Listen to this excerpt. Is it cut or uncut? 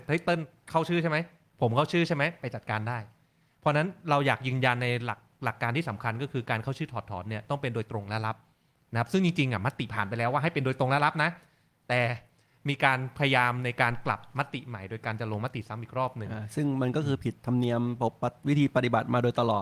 uncut